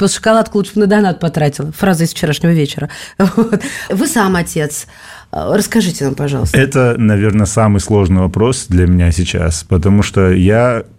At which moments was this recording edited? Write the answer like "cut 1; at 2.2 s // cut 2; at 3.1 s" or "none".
cut 1; at 3.9 s